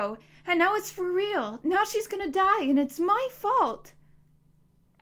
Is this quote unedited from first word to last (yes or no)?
yes